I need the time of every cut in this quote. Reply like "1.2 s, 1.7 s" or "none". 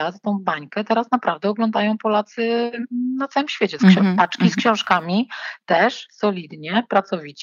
3.8 s